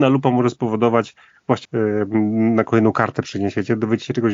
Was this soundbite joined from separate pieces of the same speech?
yes; 1 cut; at 1.7 s

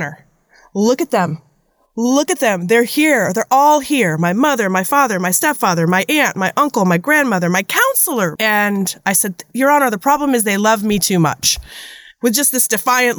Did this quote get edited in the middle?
yes; 1 cut; at 8.4 s

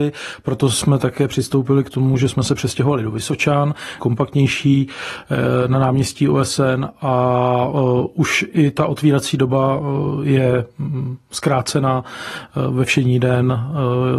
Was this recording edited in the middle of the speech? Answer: yes; 1 cut; at 4.0 s

